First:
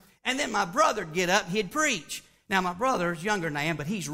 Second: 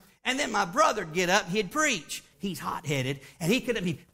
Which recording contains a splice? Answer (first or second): second